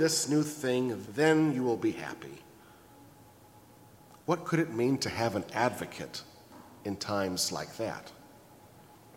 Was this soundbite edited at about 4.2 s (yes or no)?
no